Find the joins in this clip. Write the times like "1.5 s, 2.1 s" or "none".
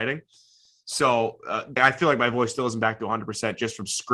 1.8 s